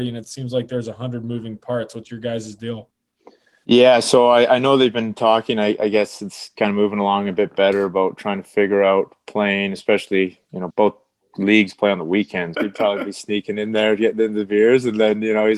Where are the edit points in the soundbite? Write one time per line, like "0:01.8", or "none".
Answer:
0:10.7
0:12.5